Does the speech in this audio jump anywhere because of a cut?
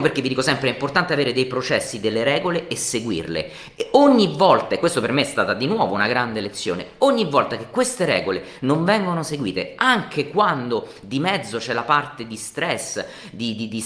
no; 0 cuts

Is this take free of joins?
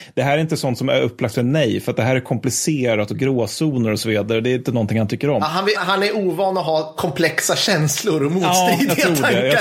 no; 1 cut; at 5.7 s

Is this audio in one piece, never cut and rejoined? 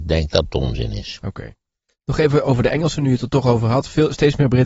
yes; 0 cuts

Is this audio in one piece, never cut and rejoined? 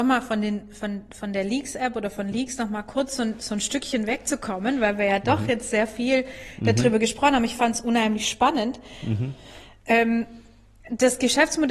yes; 0 cuts

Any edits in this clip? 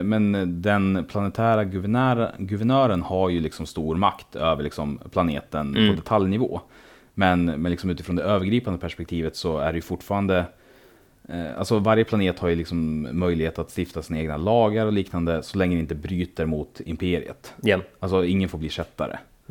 no; 0 cuts

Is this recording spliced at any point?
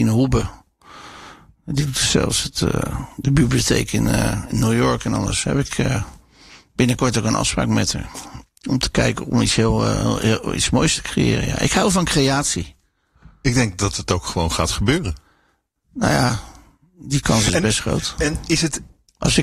no; 0 cuts

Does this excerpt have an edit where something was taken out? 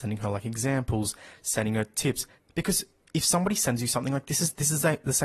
yes; 1 cut; at 2.4 s

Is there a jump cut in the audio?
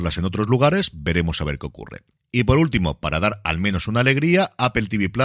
no; 0 cuts

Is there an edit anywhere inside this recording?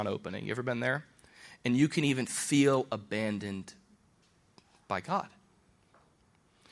no; 0 cuts

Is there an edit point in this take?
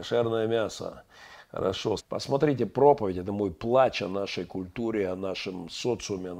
yes; 1 cut; at 2.0 s

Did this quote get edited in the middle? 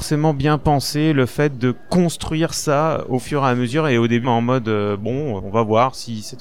yes; 2 cuts; at 4.2 s, 5.4 s

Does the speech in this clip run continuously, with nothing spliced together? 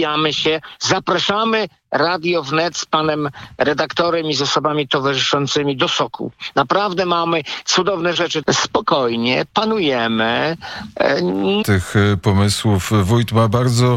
no; 2 cuts; at 8.4 s, 11.6 s

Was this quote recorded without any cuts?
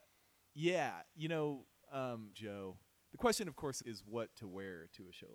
no; 2 cuts; at 2.3 s, 3.8 s

